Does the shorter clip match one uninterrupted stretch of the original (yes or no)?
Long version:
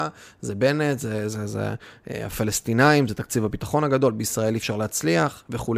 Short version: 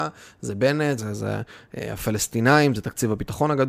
no